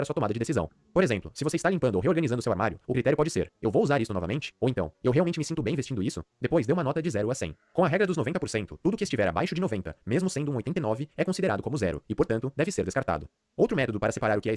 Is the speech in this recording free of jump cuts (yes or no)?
yes